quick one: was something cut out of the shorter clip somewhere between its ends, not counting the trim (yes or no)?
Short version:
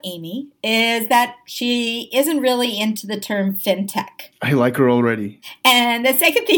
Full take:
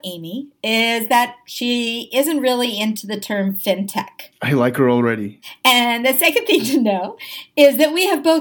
no